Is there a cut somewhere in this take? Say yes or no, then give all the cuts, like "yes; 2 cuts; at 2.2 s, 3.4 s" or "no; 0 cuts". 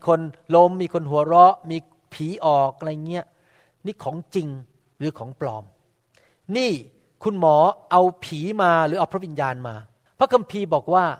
no; 0 cuts